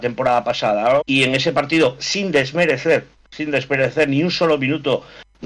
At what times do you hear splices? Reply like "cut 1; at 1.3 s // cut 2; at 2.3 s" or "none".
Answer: cut 1; at 1.0 s